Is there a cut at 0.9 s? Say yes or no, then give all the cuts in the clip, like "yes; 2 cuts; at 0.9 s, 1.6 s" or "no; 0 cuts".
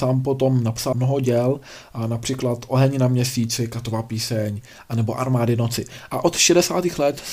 yes; 1 cut; at 0.9 s